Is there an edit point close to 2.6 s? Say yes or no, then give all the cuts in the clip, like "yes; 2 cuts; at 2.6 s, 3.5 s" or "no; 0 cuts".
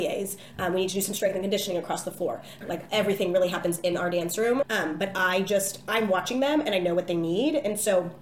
yes; 2 cuts; at 2.6 s, 4.6 s